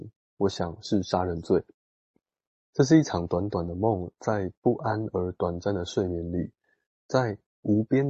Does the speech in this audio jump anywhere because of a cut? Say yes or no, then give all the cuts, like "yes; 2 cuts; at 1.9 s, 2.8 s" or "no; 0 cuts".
yes; 1 cut; at 2.5 s